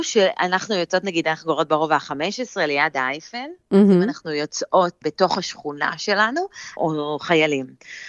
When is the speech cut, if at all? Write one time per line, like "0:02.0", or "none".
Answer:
0:05.0
0:06.8